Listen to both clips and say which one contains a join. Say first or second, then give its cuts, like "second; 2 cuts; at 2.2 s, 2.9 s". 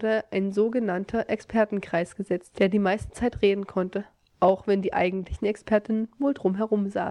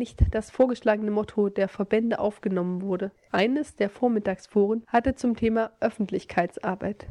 second; 1 cut; at 3.3 s